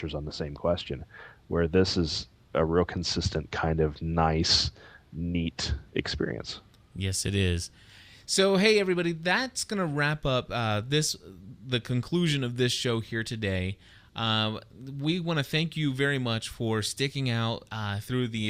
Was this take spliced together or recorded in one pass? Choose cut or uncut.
uncut